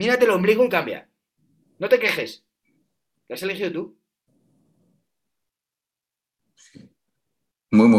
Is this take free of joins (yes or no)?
yes